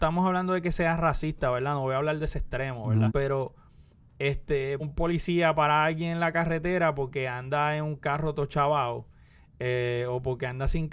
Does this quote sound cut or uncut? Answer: cut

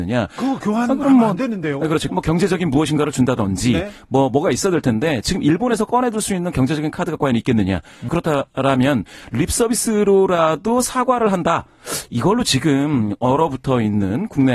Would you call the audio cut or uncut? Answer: cut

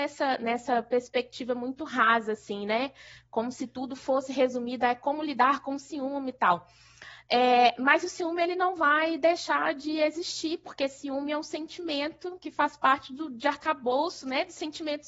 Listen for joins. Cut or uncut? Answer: uncut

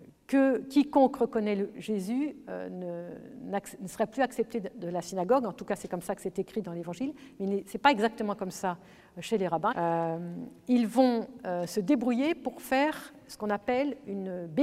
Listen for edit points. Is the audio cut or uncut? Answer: cut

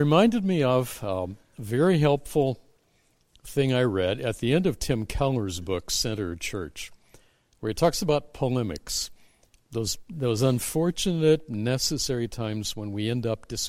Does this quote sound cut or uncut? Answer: uncut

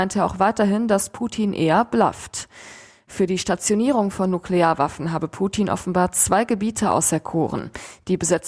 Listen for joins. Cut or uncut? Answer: uncut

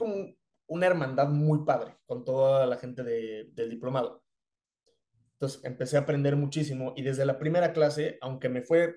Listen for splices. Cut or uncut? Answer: uncut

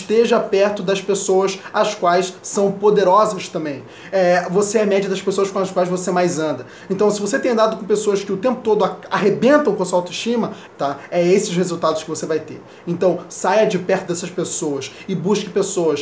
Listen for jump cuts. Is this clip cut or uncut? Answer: cut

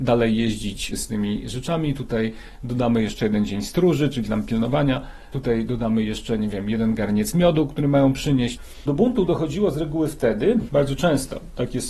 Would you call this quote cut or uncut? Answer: uncut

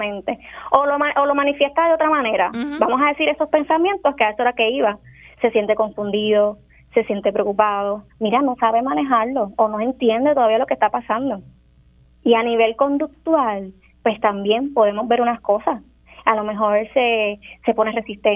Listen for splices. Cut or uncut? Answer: uncut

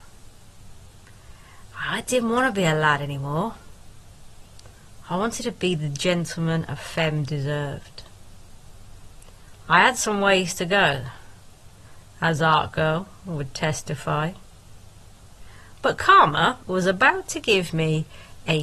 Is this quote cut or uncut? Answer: cut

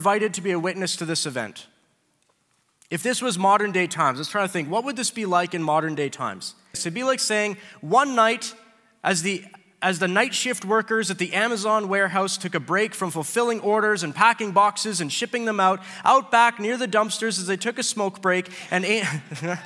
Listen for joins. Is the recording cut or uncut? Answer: cut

